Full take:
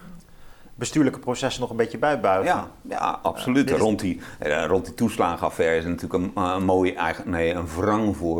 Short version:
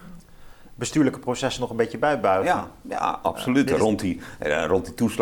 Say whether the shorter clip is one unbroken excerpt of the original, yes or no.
yes